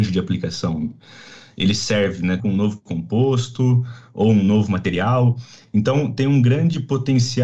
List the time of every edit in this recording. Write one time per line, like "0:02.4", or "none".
0:02.4